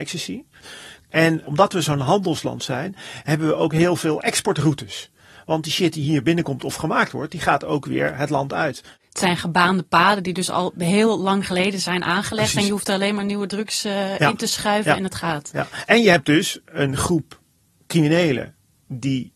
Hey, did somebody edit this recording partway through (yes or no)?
no